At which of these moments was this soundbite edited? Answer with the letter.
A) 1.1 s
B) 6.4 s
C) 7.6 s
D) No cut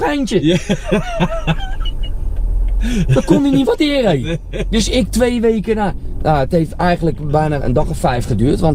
C